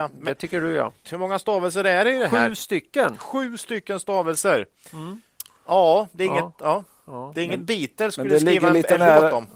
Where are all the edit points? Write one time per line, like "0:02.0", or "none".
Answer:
0:01.0